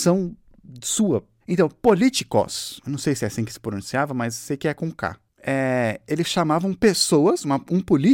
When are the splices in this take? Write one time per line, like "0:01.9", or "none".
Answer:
0:01.4

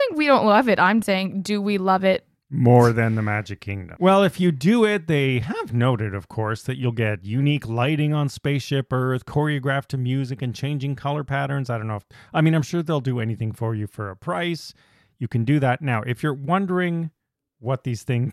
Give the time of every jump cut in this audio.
0:01.0
0:04.0

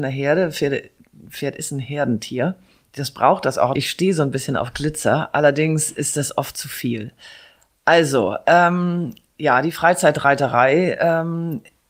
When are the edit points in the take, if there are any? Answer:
0:03.7

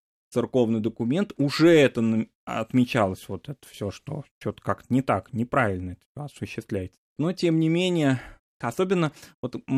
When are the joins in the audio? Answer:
0:07.2
0:08.6

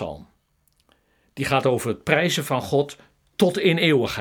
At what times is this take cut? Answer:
none

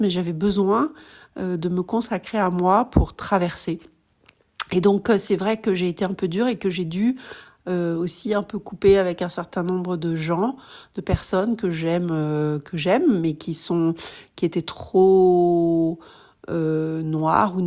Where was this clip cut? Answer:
none

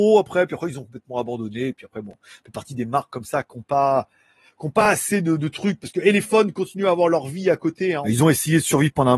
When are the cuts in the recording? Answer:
0:08.0

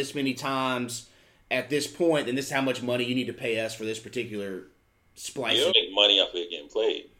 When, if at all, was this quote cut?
0:05.7

